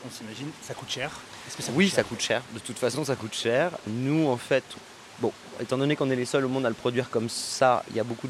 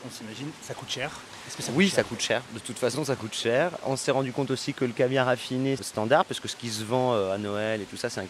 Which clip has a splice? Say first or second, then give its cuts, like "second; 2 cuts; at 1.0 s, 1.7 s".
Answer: second; 2 cuts; at 3.8 s, 5.8 s